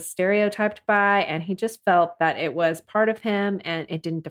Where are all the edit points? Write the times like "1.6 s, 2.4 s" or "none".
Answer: none